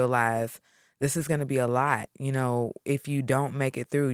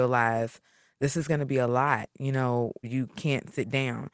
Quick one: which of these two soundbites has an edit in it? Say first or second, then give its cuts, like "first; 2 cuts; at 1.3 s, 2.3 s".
second; 1 cut; at 2.8 s